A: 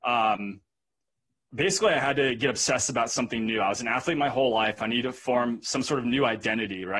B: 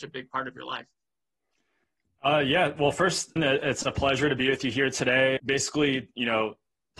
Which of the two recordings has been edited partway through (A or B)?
B